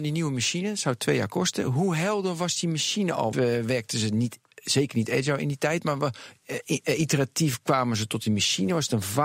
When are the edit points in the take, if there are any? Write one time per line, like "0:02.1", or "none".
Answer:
0:03.3